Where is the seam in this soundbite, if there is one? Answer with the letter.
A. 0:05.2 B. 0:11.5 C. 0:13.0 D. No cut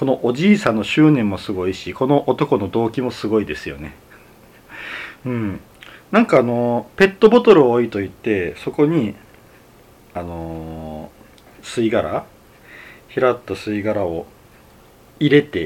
D